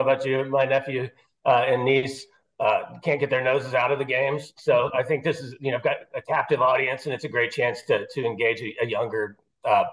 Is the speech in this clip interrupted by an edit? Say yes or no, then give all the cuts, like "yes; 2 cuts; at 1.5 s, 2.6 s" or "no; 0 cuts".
no; 0 cuts